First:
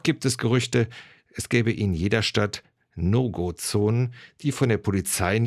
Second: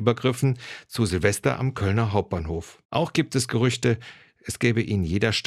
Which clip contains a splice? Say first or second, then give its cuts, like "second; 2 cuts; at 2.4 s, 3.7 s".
second; 1 cut; at 2.8 s